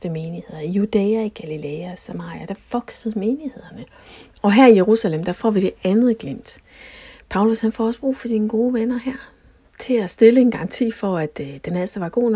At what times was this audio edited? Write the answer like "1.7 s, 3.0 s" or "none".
4.3 s